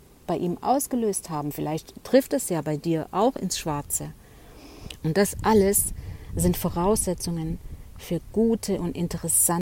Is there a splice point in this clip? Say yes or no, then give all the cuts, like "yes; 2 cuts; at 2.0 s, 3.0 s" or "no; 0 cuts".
yes; 1 cut; at 5.0 s